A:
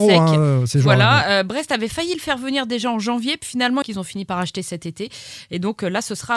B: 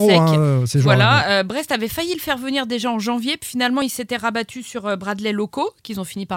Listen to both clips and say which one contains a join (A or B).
A